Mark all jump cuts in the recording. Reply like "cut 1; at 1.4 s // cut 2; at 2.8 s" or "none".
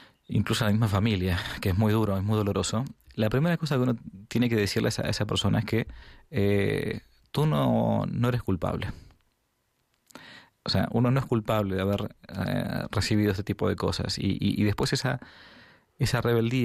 none